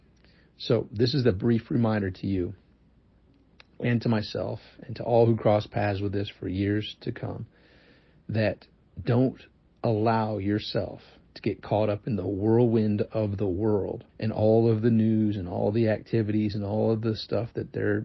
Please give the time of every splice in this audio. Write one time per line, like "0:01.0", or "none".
0:14.1